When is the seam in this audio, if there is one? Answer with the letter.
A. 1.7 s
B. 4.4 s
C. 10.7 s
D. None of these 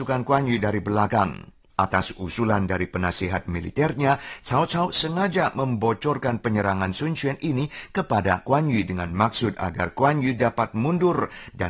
A